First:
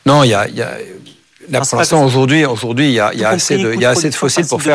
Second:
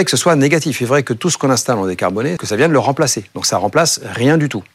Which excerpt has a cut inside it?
second; 1 cut; at 2.4 s

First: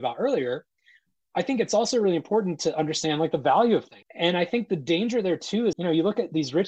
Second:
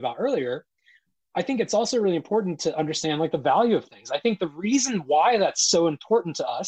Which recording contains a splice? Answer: first; 2 cuts; at 4.0 s, 5.7 s

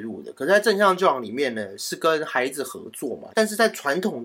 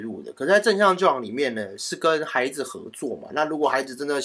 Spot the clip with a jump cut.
first; 1 cut; at 3.3 s

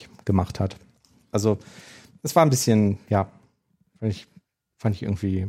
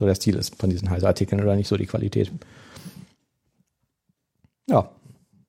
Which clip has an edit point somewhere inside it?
first; 1 cut; at 1.3 s

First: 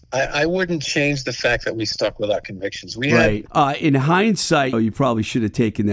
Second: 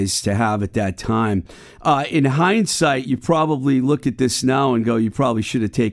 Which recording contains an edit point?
first; 2 cuts; at 3.5 s, 4.7 s

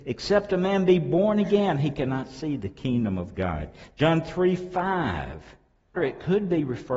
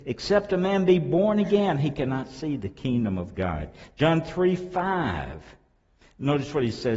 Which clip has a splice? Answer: first; 1 cut; at 6.0 s

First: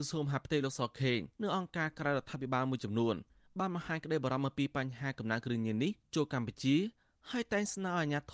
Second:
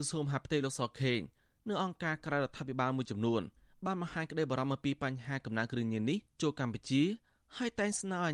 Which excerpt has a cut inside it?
first; 1 cut; at 1.3 s

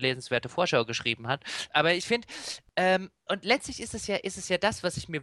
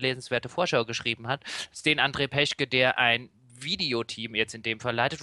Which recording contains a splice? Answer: first; 2 cuts; at 1.7 s, 3.3 s

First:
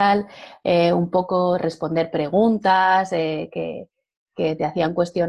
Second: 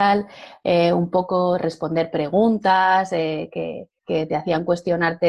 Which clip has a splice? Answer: second; 1 cut; at 4.0 s

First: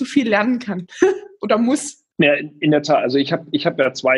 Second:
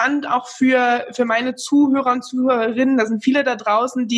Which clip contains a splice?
first; 1 cut; at 2.1 s

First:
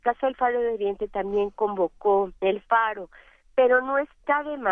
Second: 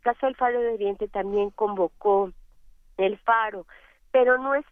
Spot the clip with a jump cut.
first; 1 cut; at 2.4 s

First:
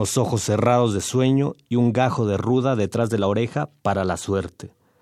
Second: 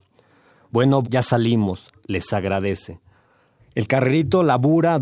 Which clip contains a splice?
second; 2 cuts; at 1.0 s, 3.6 s

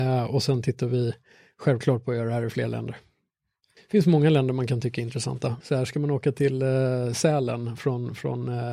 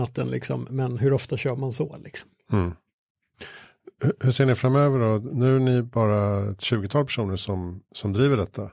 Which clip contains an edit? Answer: first; 1 cut; at 5.6 s

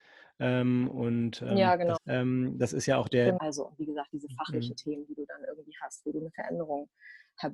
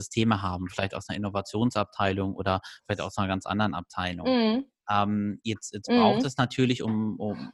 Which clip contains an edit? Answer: first; 2 cuts; at 2.0 s, 3.4 s

